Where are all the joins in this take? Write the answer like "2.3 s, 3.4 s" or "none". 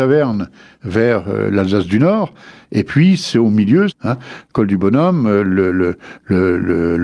3.9 s

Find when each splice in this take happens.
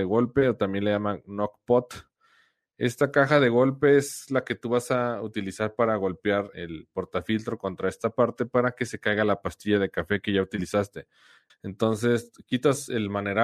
6.5 s, 11.5 s

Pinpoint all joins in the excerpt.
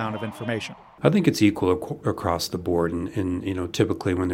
1.0 s

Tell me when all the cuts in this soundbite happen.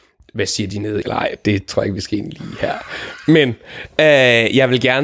1.0 s

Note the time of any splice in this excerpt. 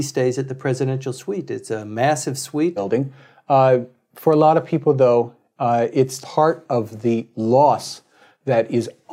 2.8 s, 6.2 s

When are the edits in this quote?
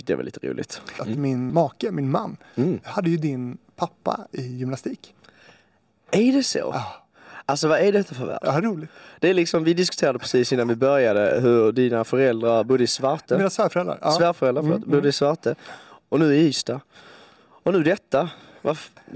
1.5 s

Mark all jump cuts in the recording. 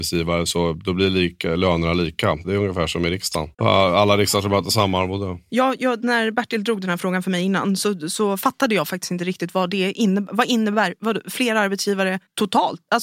3.5 s

